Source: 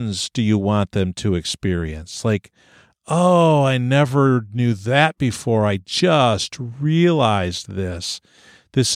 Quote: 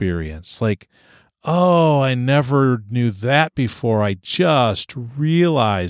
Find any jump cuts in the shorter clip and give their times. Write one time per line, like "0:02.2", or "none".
none